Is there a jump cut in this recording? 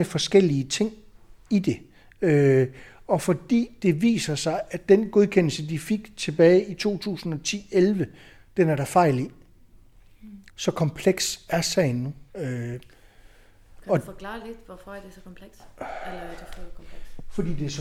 yes; 2 cuts; at 10.5 s, 12.3 s

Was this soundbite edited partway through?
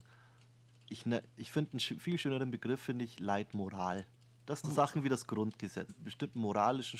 yes; 2 cuts; at 4.6 s, 5.9 s

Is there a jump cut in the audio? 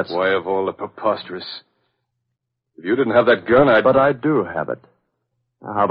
no; 0 cuts

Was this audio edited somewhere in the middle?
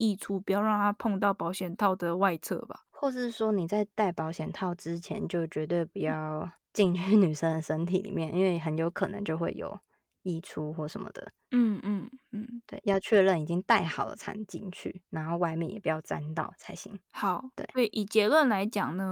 no; 0 cuts

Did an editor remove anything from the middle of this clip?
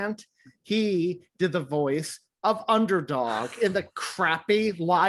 no; 0 cuts

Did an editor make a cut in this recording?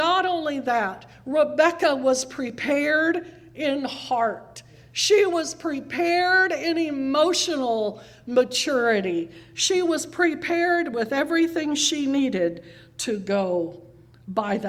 no; 0 cuts

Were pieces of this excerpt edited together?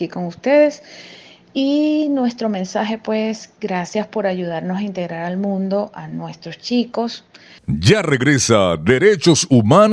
yes; 1 cut; at 7.6 s

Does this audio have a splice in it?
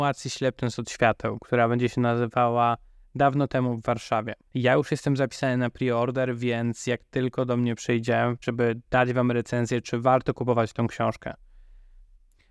yes; 2 cuts; at 4.5 s, 8.4 s

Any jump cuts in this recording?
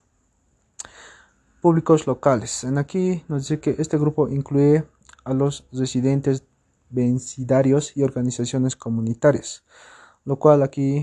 no; 0 cuts

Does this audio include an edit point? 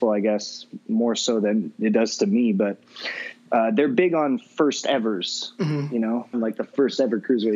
yes; 1 cut; at 6.3 s

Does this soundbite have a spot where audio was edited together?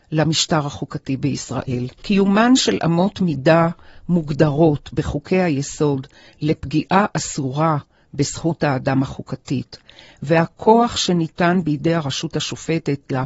yes; 1 cut; at 2.0 s

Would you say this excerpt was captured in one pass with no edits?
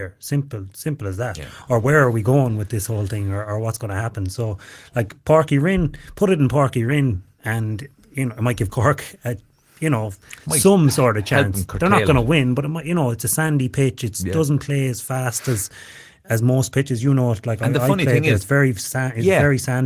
yes; 0 cuts

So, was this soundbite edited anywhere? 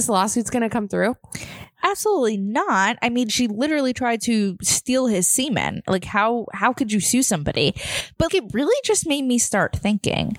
yes; 1 cut; at 8.3 s

